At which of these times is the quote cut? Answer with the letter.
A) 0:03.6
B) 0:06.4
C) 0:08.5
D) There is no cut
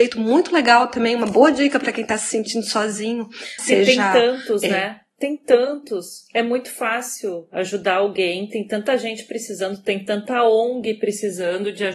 A